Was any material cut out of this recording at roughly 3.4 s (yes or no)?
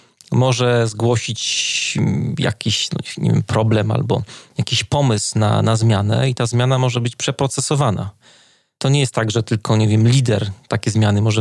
no